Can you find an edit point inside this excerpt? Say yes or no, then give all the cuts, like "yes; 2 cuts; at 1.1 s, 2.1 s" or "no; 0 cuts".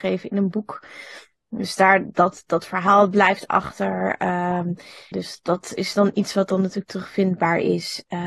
yes; 1 cut; at 5.1 s